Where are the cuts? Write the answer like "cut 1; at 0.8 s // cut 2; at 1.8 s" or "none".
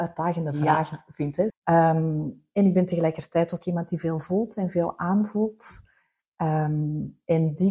cut 1; at 1.5 s

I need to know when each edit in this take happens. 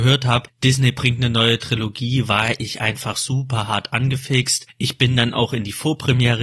none

